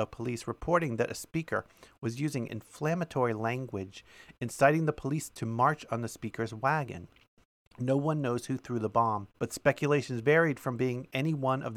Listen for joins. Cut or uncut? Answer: cut